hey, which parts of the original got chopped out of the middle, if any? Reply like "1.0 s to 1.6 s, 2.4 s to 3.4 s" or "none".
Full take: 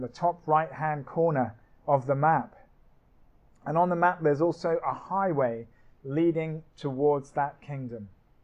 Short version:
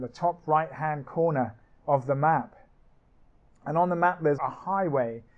4.4 s to 4.8 s